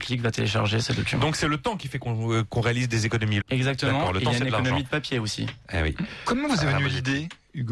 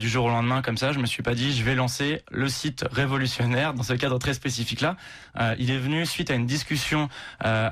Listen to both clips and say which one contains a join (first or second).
first